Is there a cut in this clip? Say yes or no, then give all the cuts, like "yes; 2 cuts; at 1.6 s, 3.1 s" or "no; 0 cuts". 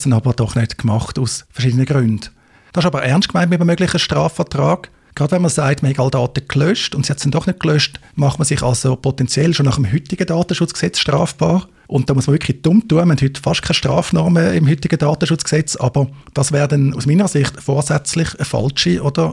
no; 0 cuts